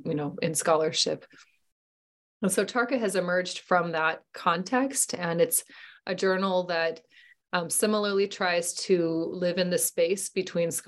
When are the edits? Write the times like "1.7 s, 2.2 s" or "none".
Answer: none